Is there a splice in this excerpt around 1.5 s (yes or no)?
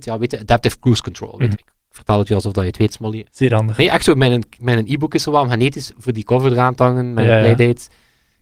yes